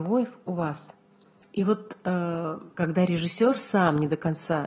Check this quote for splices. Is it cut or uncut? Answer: cut